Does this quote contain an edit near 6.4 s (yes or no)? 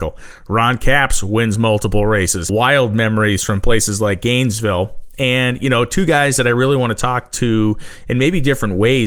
no